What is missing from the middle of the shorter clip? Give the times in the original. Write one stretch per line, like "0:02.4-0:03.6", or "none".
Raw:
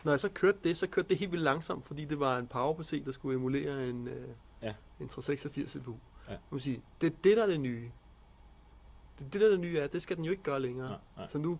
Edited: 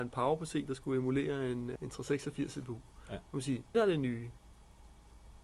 0:04.1-0:04.9
0:06.9-0:07.4